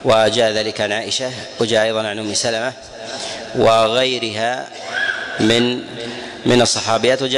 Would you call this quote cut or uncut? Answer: uncut